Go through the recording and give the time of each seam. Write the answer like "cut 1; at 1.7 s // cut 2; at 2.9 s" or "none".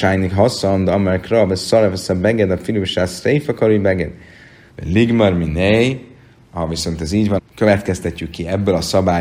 cut 1; at 4.7 s // cut 2; at 7.4 s